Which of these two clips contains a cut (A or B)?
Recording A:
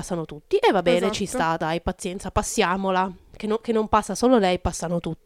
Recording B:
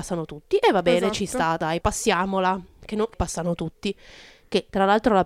B